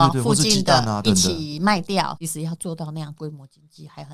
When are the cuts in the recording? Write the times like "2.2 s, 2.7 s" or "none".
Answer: 1.0 s, 2.2 s